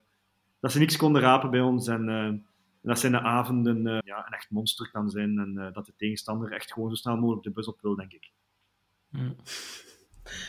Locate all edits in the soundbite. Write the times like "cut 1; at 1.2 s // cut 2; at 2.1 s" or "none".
cut 1; at 4.0 s